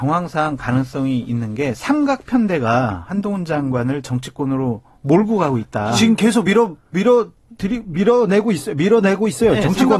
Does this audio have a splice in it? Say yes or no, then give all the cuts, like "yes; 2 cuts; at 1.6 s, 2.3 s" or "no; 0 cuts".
no; 0 cuts